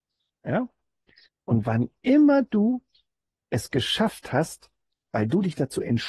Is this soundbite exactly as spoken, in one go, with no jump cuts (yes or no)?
no